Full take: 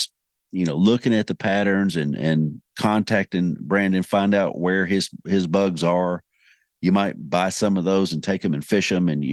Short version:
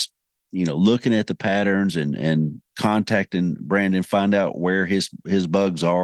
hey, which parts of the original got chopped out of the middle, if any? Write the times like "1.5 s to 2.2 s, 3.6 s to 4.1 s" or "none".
none